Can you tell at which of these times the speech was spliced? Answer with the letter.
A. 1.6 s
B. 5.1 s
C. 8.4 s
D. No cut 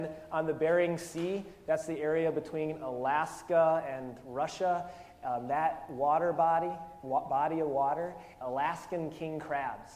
C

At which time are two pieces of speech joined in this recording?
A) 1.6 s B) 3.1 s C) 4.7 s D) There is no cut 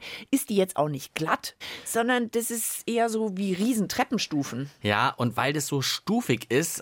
A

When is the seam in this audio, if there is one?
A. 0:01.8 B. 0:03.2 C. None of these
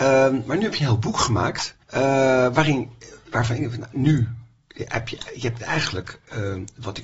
A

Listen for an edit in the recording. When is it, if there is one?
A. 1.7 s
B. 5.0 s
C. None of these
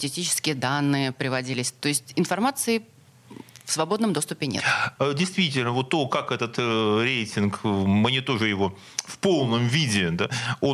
B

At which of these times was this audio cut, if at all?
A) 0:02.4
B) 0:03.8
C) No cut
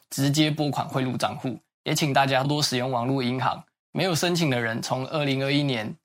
A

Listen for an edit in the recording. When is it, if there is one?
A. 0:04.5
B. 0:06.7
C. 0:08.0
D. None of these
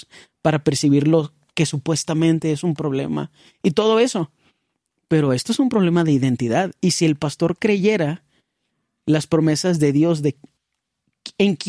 D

